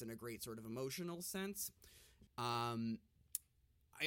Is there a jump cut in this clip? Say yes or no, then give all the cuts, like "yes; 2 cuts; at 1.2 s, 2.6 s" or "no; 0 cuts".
yes; 1 cut; at 2.3 s